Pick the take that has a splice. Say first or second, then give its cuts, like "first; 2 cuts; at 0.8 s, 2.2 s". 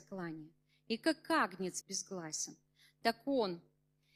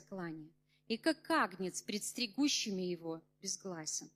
first; 1 cut; at 1.8 s